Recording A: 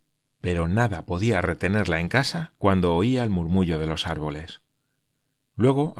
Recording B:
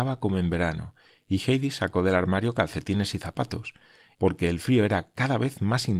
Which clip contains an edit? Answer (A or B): B